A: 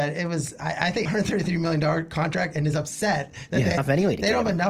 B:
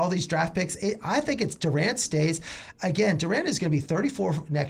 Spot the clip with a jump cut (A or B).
A